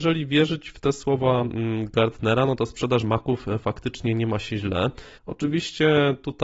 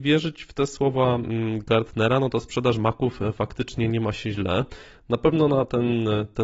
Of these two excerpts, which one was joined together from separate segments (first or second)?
first